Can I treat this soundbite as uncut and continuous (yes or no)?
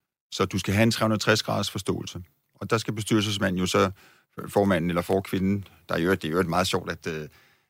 yes